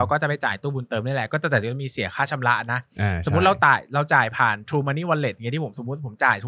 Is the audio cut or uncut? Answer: uncut